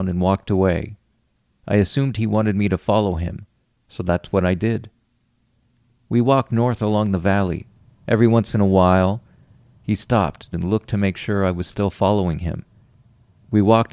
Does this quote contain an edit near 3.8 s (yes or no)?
no